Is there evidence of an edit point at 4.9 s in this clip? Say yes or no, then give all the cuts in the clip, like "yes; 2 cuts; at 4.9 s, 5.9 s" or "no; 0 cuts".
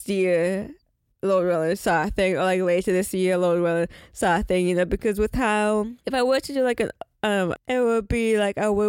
no; 1 cut; at 7.6 s